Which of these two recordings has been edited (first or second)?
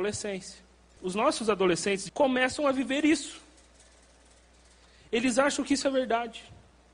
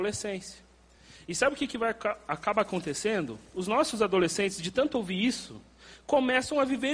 first